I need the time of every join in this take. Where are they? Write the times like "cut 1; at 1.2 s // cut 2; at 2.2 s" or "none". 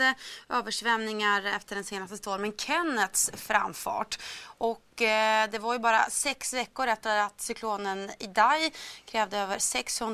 none